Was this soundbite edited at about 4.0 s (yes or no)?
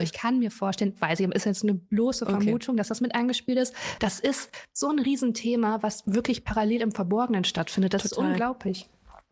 yes